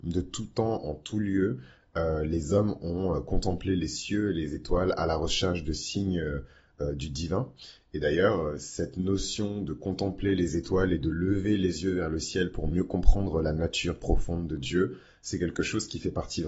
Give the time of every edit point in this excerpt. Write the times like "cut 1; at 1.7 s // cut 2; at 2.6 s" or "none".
none